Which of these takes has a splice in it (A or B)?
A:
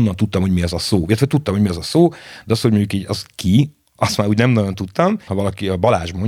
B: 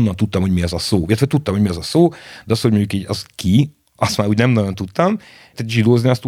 A